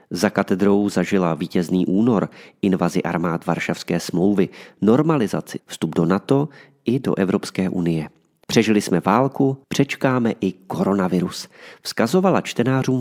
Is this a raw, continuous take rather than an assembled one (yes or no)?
no